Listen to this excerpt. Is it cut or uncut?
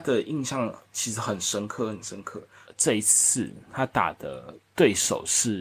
cut